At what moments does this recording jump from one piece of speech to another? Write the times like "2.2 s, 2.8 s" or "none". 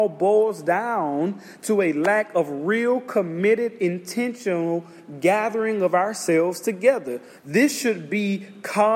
7.4 s